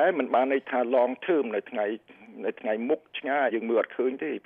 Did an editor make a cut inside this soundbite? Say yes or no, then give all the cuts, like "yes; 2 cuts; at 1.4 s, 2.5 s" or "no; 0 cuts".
yes; 1 cut; at 3.5 s